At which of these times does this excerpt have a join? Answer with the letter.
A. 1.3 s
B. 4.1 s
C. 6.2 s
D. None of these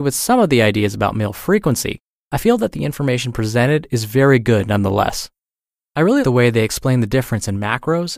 C